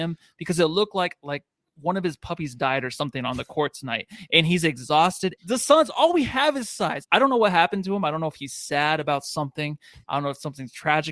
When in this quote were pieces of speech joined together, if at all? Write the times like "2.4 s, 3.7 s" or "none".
5.4 s, 7.0 s